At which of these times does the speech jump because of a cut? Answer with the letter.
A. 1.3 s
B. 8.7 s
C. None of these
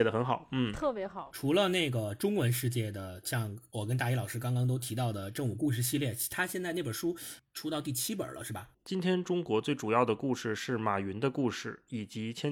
B